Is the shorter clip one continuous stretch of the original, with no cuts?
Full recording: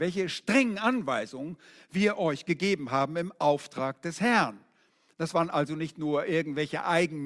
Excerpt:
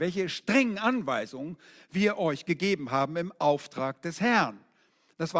yes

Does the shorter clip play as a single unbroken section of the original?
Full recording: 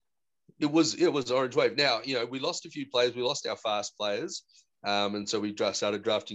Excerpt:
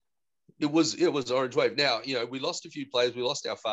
yes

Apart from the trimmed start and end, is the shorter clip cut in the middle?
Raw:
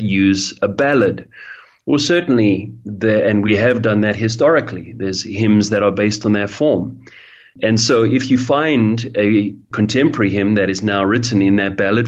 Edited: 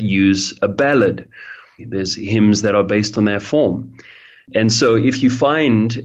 yes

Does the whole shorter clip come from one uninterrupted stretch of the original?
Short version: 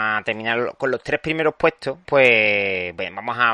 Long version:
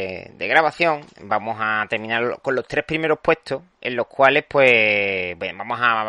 no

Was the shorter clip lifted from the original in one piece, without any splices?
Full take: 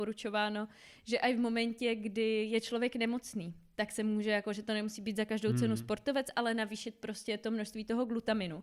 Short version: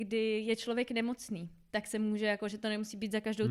yes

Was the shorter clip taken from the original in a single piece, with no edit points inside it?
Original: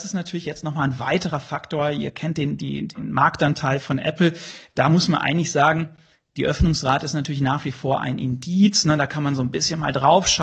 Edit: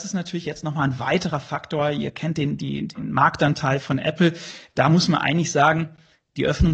yes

